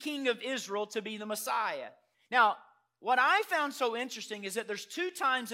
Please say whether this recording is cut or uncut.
cut